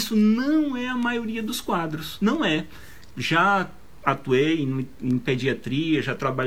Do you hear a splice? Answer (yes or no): yes